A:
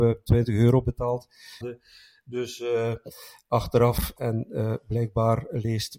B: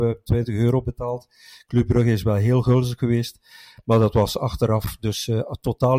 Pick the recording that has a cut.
A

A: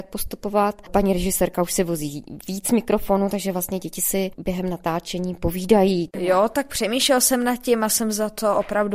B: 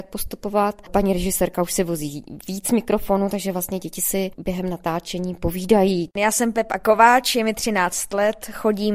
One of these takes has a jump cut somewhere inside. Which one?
A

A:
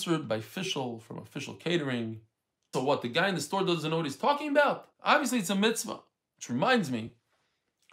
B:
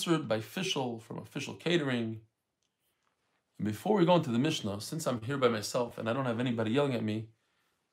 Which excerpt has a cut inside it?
A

